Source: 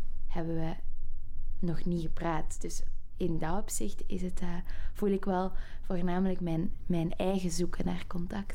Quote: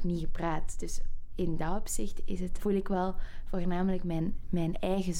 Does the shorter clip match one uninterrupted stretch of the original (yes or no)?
no